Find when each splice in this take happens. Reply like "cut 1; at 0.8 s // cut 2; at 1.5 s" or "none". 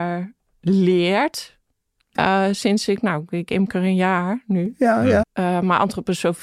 cut 1; at 2.2 s // cut 2; at 5.2 s